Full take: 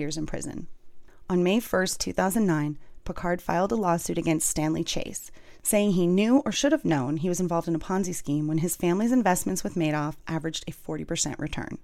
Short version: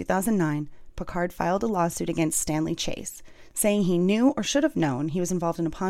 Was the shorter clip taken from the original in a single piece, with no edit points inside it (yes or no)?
yes